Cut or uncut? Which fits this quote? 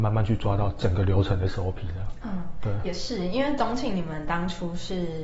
uncut